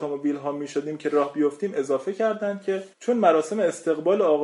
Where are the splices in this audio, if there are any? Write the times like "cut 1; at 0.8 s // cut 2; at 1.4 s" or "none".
cut 1; at 2.9 s